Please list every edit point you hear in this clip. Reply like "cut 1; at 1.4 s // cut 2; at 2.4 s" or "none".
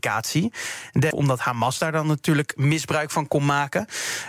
cut 1; at 1.1 s